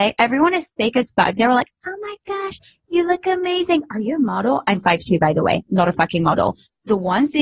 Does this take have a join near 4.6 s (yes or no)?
no